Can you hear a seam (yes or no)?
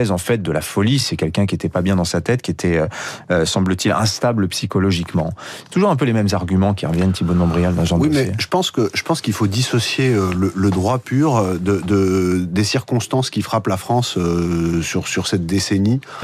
no